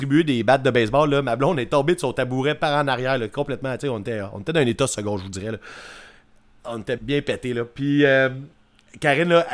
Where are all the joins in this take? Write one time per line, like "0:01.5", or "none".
0:07.0